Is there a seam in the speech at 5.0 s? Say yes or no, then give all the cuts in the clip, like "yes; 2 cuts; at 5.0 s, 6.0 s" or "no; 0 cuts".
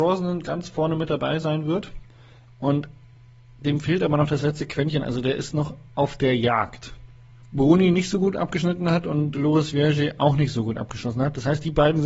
no; 2 cuts; at 2.5 s, 7.4 s